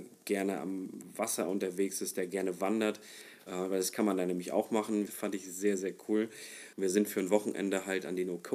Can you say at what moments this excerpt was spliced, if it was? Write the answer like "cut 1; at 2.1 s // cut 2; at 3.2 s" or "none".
cut 1; at 5.1 s // cut 2; at 6.7 s

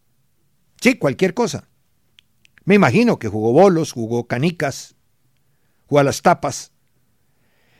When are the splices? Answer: none

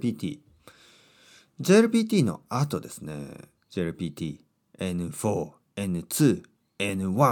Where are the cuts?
cut 1; at 3.6 s // cut 2; at 5.6 s

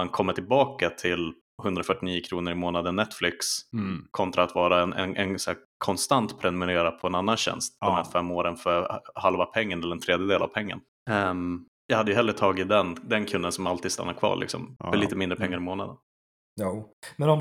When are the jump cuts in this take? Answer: none

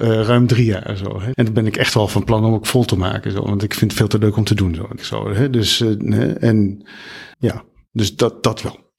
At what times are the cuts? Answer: cut 1; at 1.3 s // cut 2; at 5.0 s // cut 3; at 7.3 s

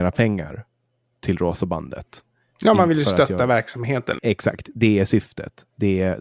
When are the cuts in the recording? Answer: cut 1; at 4.2 s

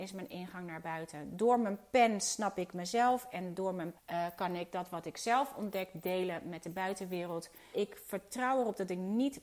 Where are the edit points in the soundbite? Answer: cut 1; at 4.0 s // cut 2; at 7.7 s

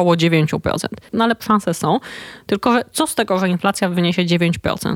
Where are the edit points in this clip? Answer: cut 1; at 1.1 s

